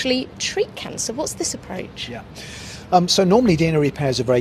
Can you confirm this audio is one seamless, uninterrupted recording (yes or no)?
yes